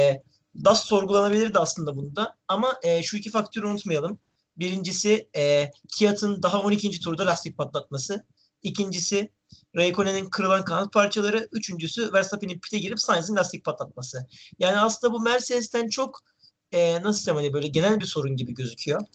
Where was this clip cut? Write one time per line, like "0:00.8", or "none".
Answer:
none